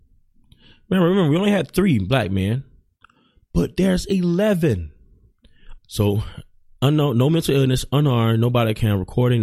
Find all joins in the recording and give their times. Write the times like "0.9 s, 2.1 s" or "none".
5.8 s

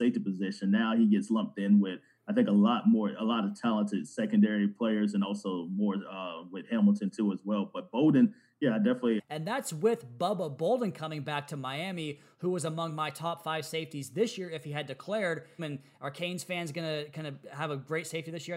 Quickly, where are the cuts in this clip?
9.2 s, 15.6 s

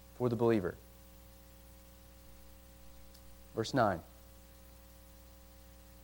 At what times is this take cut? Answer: none

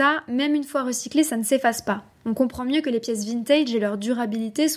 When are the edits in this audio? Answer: none

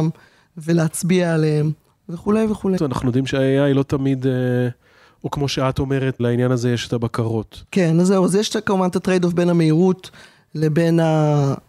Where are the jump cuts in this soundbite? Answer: 2.8 s, 6.2 s

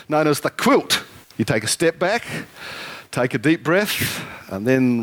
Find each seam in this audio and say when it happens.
1.2 s

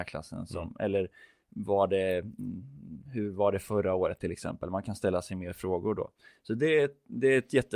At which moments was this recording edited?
none

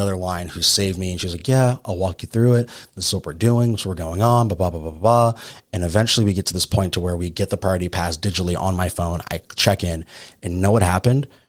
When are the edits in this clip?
none

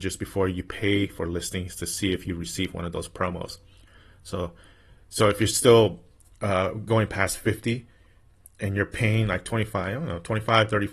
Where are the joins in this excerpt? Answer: none

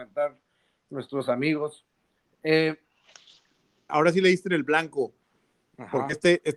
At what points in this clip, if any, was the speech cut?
3.9 s

